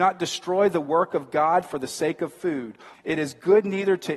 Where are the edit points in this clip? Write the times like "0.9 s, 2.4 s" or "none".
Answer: 2.9 s